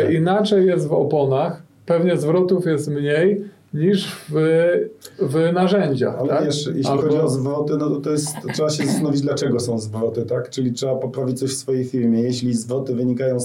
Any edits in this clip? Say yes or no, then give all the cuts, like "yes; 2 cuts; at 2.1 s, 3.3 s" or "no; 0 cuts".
no; 0 cuts